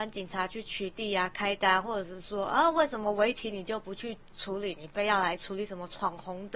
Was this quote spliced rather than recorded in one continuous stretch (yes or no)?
no